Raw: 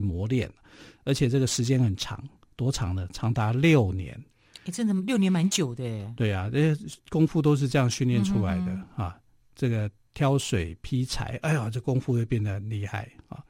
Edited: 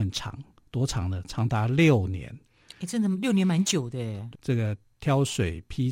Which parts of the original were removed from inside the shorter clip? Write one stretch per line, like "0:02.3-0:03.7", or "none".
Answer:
0:06.2-0:09.5